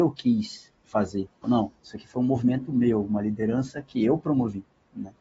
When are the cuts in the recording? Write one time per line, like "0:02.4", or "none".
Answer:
0:01.4